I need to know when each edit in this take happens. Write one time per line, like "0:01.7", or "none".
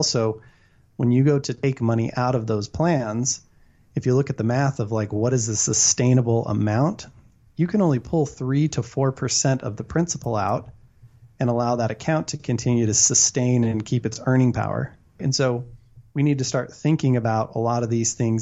0:15.2